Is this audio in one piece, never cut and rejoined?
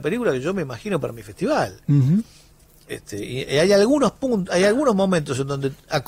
yes; 0 cuts

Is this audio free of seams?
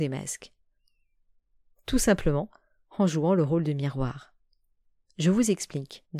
yes; 0 cuts

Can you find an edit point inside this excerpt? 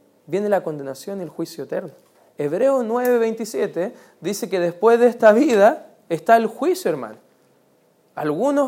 no; 0 cuts

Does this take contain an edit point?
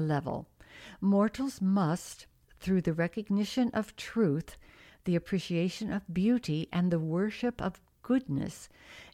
no; 0 cuts

